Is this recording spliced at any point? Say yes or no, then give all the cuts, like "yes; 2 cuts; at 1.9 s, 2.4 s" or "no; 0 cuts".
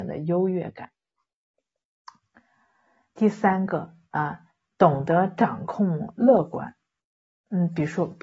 no; 0 cuts